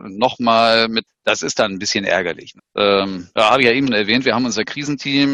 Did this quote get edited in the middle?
yes; 3 cuts; at 1.1 s, 2.6 s, 3.9 s

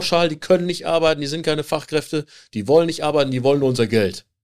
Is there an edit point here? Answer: no; 0 cuts

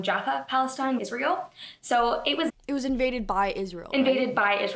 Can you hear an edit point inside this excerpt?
yes; 2 cuts; at 1.0 s, 2.5 s

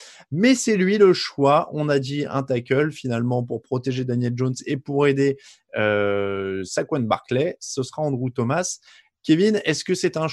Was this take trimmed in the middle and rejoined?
no; 0 cuts

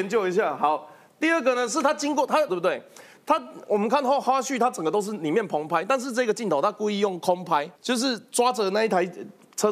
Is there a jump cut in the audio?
yes; 2 cuts; at 2.5 s, 7.8 s

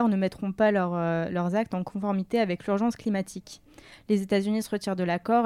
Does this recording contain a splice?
yes; 1 cut; at 3.9 s

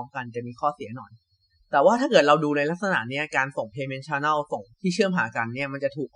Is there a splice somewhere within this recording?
yes; 1 cut; at 4.7 s

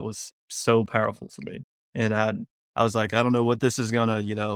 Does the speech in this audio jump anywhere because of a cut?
yes; 1 cut; at 1.8 s

